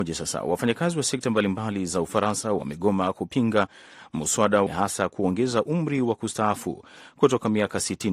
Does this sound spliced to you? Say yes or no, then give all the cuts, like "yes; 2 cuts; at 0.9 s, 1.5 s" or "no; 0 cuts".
yes; 1 cut; at 4.7 s